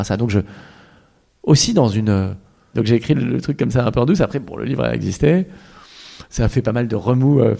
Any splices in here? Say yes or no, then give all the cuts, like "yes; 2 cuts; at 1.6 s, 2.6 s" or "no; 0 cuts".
yes; 1 cut; at 2.7 s